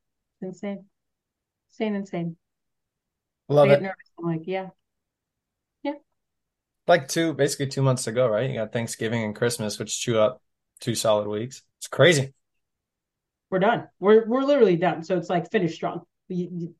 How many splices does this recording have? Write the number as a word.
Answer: one